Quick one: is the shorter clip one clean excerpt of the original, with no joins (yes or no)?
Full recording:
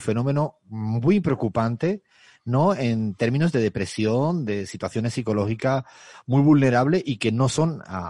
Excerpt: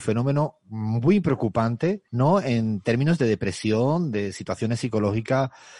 no